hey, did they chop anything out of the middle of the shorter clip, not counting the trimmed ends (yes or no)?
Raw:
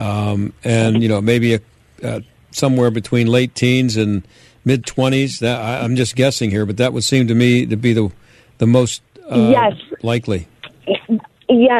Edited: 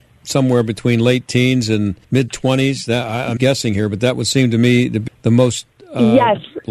yes